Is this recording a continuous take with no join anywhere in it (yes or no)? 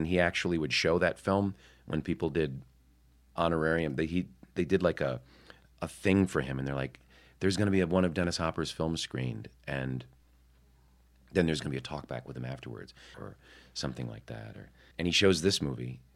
no